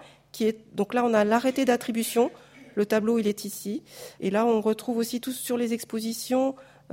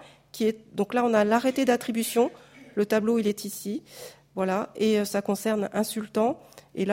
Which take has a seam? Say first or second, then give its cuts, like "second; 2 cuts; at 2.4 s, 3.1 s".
first; 1 cut; at 4.2 s